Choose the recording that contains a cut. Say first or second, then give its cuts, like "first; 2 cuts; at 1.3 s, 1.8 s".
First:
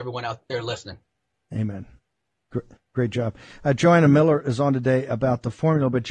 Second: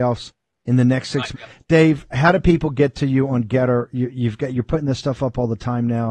second; 1 cut; at 1.3 s